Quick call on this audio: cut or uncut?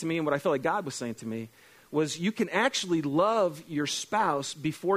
uncut